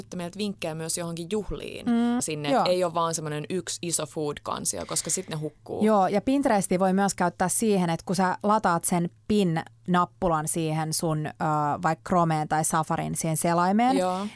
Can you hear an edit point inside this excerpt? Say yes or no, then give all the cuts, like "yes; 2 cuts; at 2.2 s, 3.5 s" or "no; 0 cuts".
yes; 1 cut; at 2.2 s